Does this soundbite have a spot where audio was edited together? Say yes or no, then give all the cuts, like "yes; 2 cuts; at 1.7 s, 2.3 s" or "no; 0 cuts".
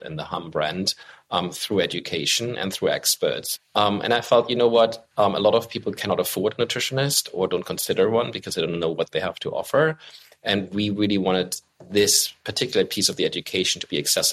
yes; 1 cut; at 3.6 s